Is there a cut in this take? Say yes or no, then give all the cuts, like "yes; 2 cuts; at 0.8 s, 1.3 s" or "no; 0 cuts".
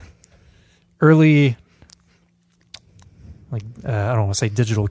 no; 0 cuts